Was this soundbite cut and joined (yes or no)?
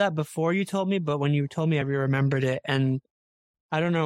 no